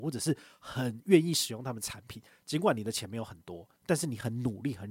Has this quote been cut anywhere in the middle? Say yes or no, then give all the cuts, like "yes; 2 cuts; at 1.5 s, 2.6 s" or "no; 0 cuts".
no; 0 cuts